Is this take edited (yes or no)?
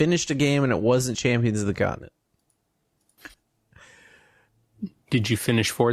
yes